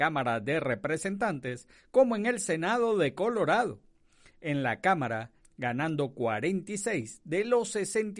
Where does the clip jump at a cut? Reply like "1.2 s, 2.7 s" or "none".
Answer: 5.4 s